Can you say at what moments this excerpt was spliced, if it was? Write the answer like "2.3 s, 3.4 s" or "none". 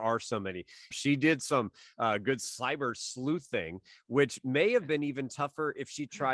0.9 s